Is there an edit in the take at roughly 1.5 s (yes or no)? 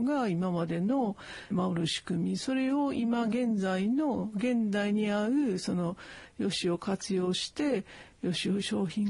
yes